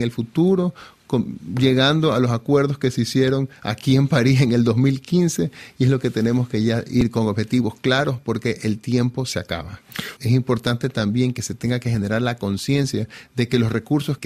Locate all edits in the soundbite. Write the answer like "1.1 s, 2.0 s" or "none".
8.2 s, 10.2 s